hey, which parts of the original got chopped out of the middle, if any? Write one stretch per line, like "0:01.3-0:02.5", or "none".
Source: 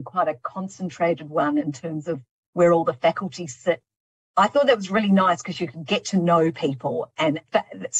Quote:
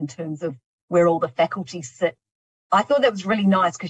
none

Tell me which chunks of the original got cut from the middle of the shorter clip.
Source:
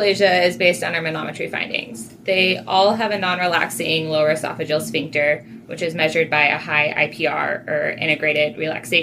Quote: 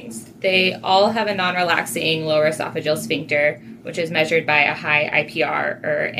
none

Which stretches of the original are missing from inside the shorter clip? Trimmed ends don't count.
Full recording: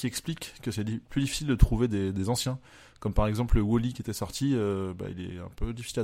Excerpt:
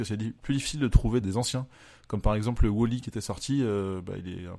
0:01.9-0:02.1

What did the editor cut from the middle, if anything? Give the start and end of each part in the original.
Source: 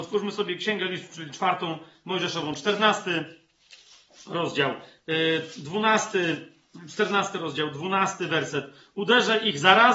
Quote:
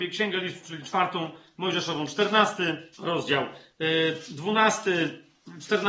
0:03.4-0:04.2

